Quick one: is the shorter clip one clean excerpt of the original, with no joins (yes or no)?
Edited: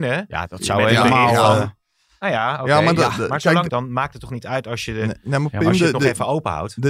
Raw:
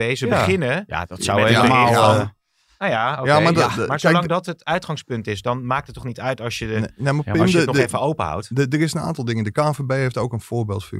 no